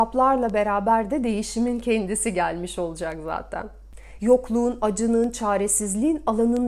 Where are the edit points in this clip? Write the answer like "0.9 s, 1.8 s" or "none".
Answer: 4.2 s